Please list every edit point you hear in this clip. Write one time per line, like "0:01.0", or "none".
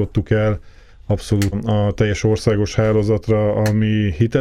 0:01.5

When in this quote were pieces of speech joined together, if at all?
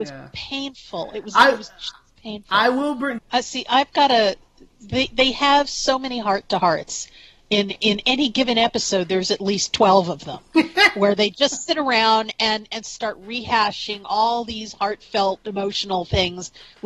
0:03.2

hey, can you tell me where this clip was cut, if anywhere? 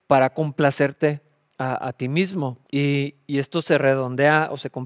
0:02.7

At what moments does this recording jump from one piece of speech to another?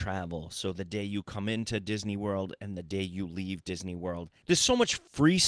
0:04.4

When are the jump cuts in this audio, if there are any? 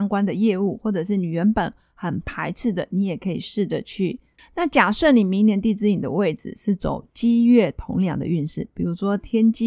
0:04.4

